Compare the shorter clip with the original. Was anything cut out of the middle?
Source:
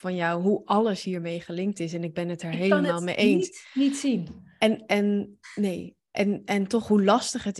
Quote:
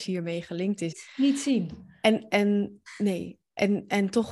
yes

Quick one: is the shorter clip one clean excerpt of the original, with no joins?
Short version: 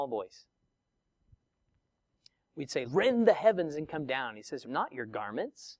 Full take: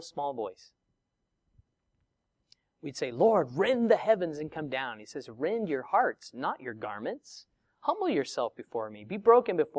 no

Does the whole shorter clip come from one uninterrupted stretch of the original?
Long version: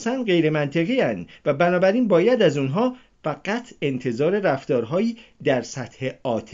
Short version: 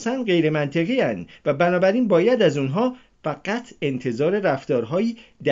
yes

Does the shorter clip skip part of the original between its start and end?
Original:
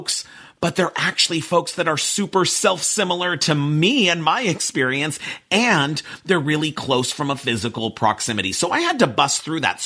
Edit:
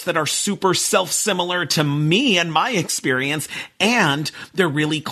no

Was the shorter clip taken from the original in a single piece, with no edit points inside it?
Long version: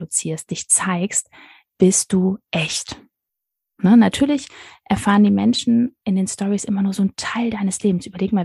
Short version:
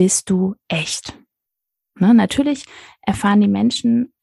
yes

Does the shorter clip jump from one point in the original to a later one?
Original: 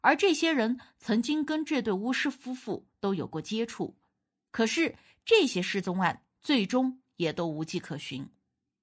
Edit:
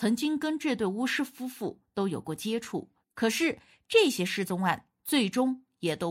yes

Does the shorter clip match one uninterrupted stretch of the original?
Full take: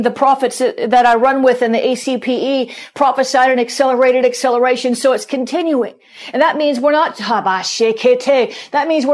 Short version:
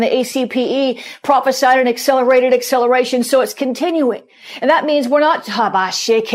yes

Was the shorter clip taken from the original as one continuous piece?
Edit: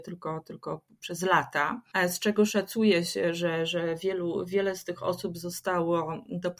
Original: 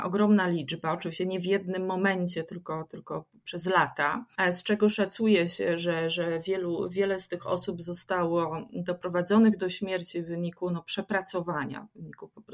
yes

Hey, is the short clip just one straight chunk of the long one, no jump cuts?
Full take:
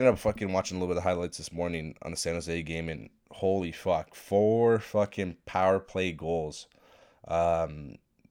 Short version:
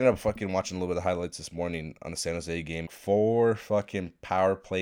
no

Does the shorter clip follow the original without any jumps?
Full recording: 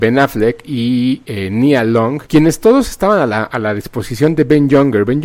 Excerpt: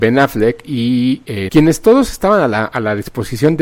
no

